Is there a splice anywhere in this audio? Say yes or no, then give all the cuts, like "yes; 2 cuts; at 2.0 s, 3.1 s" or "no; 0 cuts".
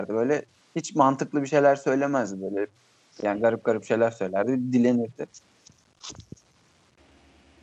no; 0 cuts